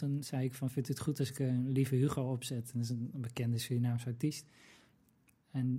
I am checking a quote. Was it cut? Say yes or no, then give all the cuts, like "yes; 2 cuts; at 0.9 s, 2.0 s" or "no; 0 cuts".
no; 0 cuts